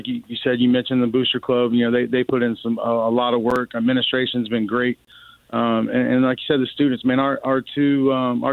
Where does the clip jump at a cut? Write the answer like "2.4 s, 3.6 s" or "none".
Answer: none